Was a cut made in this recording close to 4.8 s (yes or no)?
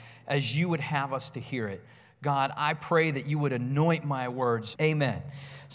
yes